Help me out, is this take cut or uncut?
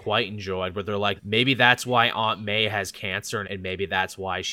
cut